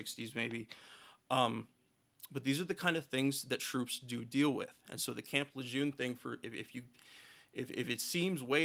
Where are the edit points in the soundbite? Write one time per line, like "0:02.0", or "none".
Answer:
none